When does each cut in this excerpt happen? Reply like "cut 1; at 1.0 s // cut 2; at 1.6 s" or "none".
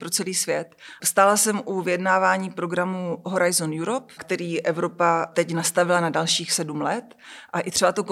cut 1; at 1.0 s // cut 2; at 4.2 s